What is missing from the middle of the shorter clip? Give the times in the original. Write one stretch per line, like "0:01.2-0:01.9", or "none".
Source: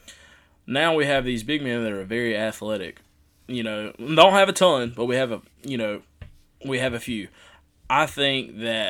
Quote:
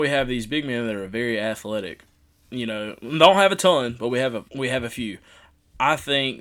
0:05.4-0:06.6